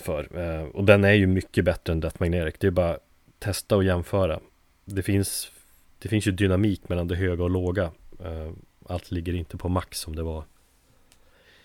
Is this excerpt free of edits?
yes; 0 cuts

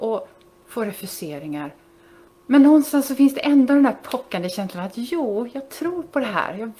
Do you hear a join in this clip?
yes; 1 cut; at 2.3 s

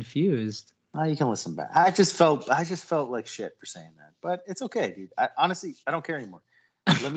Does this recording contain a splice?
no; 0 cuts

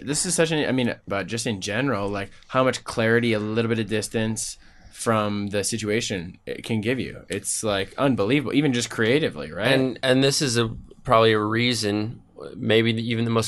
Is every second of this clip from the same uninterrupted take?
no; 1 cut; at 1.1 s

